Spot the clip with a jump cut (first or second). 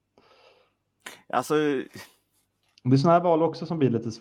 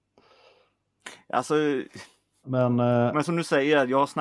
second